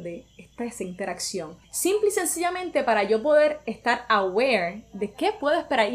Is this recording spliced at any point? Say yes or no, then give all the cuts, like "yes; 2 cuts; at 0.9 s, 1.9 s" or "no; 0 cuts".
yes; 1 cut; at 1.6 s